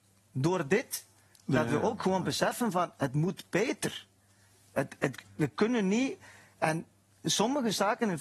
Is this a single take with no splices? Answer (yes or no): yes